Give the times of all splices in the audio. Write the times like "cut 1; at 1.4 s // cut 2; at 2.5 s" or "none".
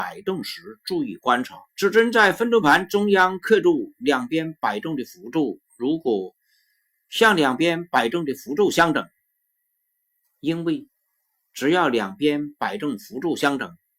cut 1; at 1.7 s // cut 2; at 10.2 s